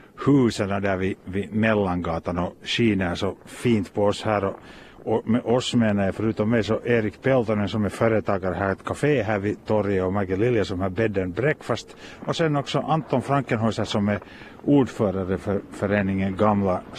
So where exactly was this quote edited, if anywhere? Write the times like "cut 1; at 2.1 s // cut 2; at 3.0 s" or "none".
none